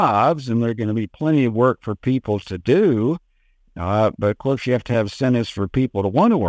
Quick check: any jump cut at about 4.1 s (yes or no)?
yes